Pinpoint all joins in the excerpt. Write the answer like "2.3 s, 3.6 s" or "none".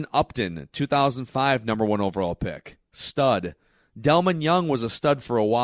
none